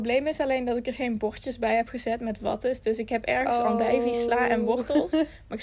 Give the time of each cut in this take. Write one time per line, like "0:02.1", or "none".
0:02.4